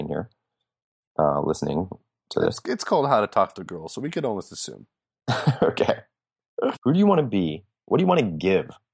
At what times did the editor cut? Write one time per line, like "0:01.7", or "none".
0:06.7